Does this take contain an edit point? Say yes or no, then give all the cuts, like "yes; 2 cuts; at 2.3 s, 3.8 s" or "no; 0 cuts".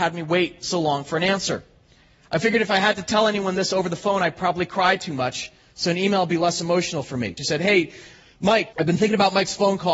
yes; 2 cuts; at 7.4 s, 8.7 s